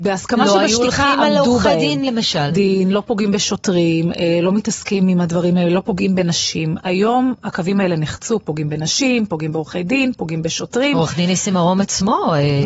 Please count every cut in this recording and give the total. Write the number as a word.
one